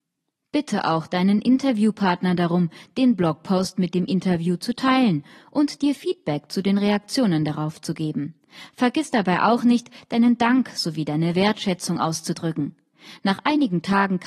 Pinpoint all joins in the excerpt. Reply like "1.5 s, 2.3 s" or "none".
none